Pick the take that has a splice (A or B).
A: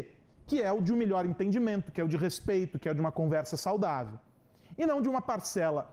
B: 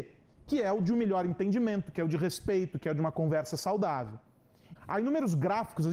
B